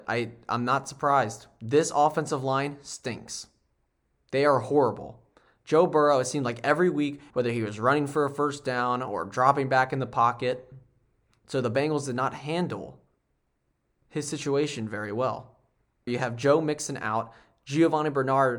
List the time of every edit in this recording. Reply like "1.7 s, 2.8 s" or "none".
7.3 s, 16.1 s